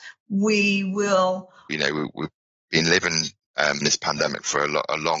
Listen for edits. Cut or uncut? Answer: cut